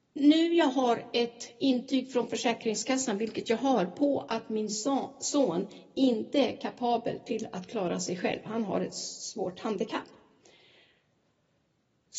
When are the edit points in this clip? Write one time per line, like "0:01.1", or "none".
none